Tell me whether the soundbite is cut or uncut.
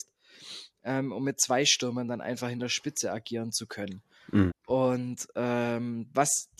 cut